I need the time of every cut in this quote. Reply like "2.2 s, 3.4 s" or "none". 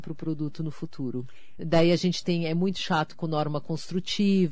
1.6 s